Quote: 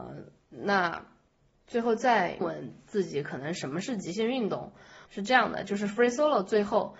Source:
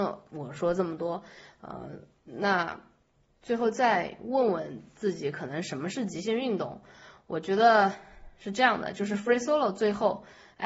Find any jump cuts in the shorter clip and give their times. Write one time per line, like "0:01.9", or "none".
0:02.4
0:05.1